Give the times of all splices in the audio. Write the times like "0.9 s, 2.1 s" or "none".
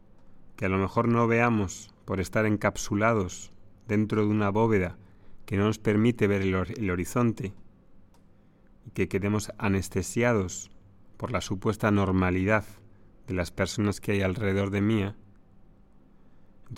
none